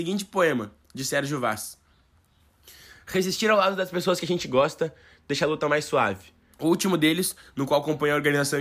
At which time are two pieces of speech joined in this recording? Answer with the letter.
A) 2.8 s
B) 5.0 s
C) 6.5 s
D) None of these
C